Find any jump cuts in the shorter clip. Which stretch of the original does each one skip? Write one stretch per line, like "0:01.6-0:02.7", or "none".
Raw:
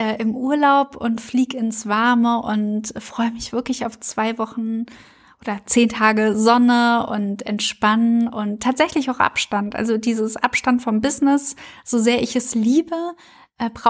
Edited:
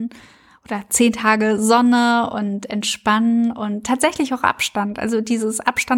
none